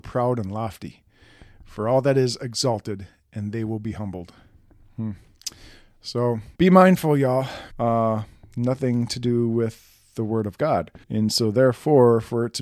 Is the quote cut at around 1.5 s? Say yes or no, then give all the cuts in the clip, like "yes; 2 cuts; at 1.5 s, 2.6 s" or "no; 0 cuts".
no; 3 cuts; at 6.5 s, 7.7 s, 11.0 s